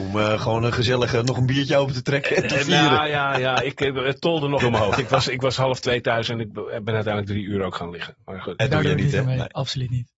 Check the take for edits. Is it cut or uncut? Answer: cut